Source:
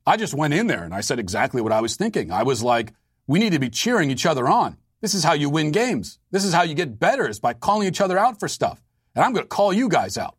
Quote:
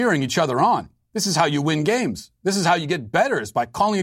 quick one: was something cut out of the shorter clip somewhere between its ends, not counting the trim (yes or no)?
no